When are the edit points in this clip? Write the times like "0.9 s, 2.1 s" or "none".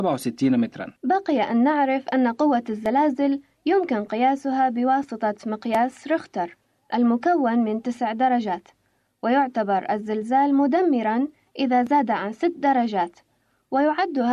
1.0 s